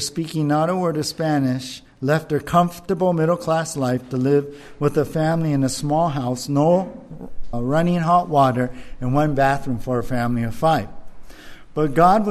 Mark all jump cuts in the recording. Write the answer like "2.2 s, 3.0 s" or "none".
7.5 s